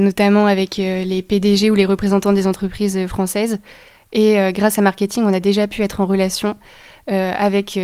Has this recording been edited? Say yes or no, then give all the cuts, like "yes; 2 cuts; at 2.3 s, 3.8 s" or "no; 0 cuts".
no; 0 cuts